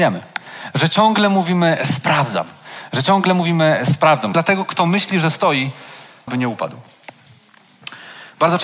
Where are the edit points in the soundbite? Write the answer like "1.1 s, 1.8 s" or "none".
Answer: 4.3 s, 6.3 s